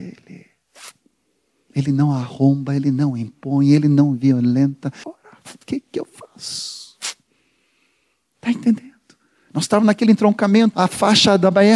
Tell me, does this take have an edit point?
yes; 2 cuts; at 5.0 s, 10.7 s

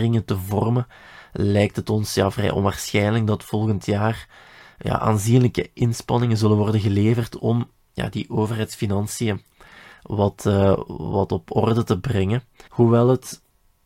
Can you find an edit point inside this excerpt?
yes; 1 cut; at 12.7 s

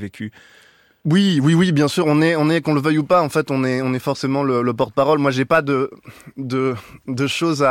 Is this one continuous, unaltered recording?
yes; 0 cuts

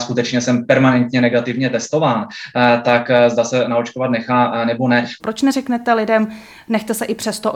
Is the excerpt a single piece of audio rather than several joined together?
no; 1 cut; at 5.2 s

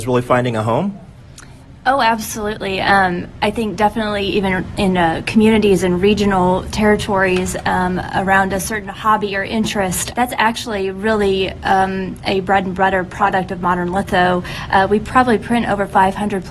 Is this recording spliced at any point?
yes; 1 cut; at 10.1 s

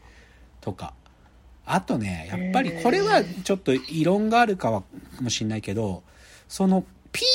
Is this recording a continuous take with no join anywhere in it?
yes; 0 cuts

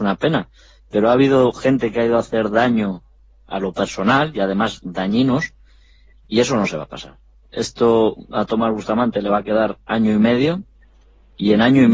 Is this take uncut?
yes; 0 cuts

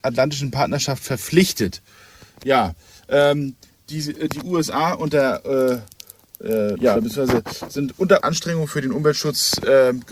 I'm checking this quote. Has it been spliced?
yes; 2 cuts; at 6.7 s, 8.2 s

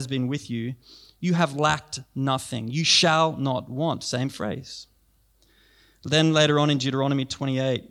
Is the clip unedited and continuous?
yes; 0 cuts

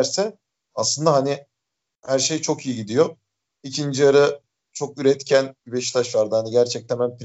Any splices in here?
no; 0 cuts

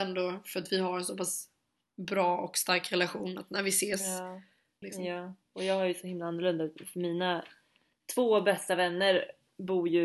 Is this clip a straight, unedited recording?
no; 1 cut; at 4.8 s

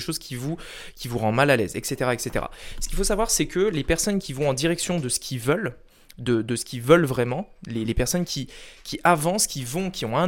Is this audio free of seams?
yes; 0 cuts

